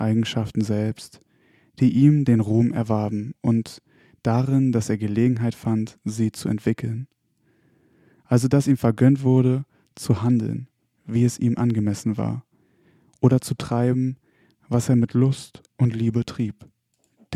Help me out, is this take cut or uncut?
uncut